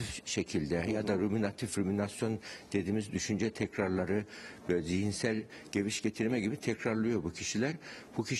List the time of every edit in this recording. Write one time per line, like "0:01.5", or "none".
none

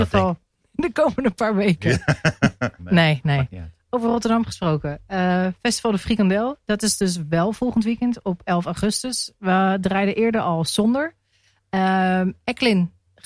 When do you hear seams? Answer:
0:02.8

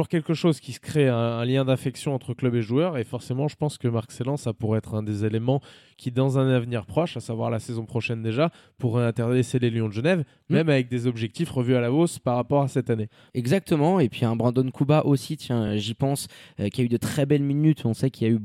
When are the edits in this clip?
none

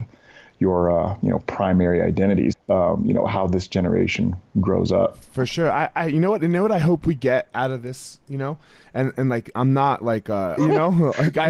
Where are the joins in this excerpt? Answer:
0:02.5
0:10.6

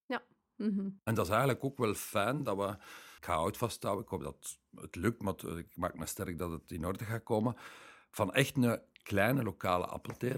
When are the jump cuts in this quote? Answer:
0:03.2

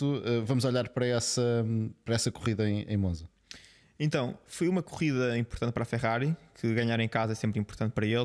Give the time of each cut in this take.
none

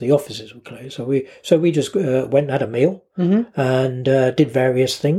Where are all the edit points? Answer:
none

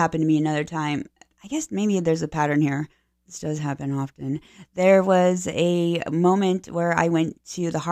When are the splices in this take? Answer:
none

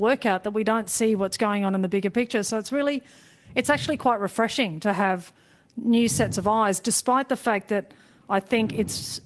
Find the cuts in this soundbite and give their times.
none

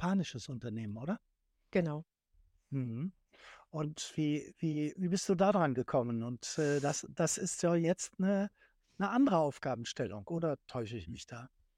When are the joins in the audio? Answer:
none

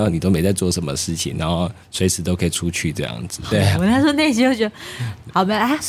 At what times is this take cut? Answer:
0:01.8
0:03.5

